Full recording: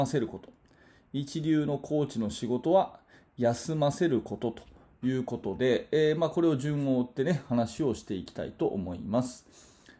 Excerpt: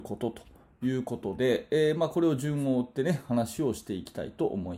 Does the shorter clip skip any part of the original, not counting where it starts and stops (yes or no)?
no